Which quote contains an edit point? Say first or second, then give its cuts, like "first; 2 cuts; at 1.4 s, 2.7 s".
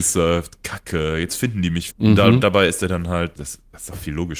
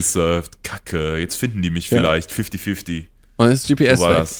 first; 2 cuts; at 1.9 s, 3.4 s